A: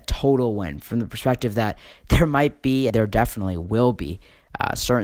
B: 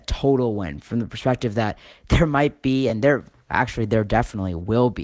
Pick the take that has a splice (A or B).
A